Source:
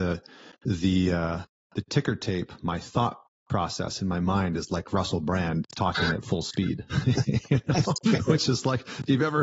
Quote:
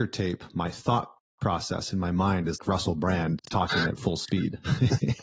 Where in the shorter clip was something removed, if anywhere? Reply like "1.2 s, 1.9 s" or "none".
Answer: 2.6 s